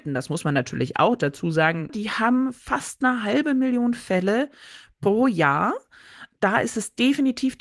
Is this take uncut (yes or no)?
no